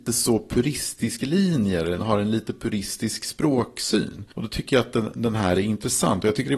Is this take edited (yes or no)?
no